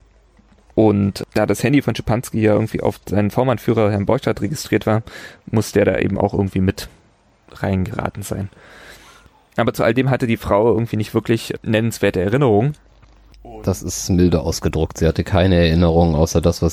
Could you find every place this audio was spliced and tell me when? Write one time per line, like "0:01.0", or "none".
none